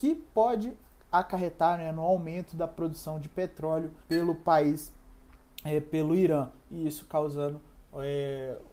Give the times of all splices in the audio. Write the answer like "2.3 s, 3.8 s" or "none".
4.0 s